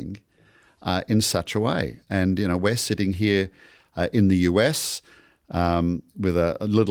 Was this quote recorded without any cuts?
yes; 0 cuts

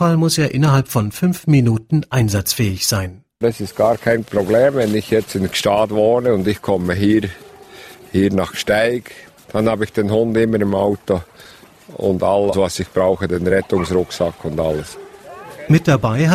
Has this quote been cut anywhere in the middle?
yes; 1 cut; at 12.5 s

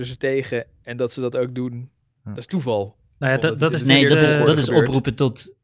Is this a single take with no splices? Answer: yes; 0 cuts

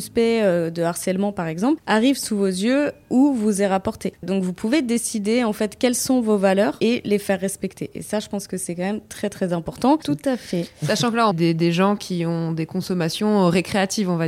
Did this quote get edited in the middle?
yes; 2 cuts; at 10.0 s, 11.3 s

